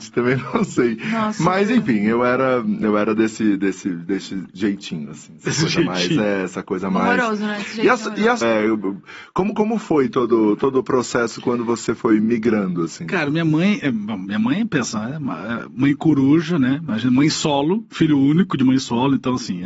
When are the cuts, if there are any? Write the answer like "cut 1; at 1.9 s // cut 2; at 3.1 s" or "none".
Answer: cut 1; at 8.4 s